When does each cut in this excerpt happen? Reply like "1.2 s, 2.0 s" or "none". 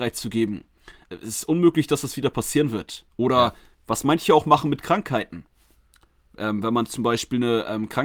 1.0 s